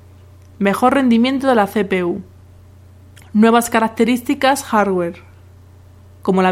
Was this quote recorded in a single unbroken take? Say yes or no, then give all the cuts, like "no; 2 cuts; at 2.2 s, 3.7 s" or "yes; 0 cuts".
no; 1 cut; at 3.2 s